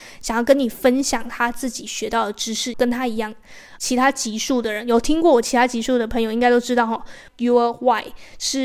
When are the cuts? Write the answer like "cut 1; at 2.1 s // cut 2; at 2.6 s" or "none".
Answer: cut 1; at 2.7 s // cut 2; at 3.8 s // cut 3; at 7.3 s